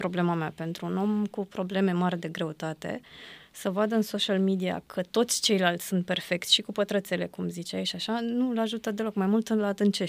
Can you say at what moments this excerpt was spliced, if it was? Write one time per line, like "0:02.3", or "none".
none